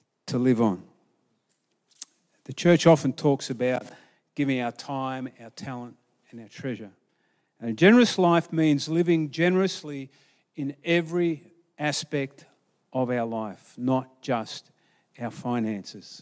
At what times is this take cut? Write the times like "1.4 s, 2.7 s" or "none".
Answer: none